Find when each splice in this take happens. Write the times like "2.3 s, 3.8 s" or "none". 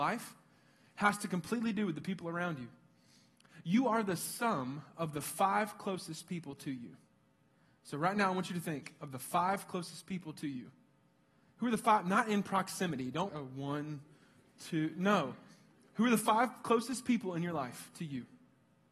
13.3 s